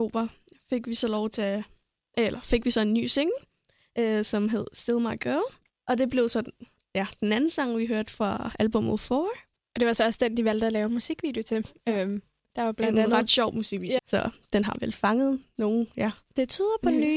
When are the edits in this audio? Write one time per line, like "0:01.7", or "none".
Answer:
0:14.0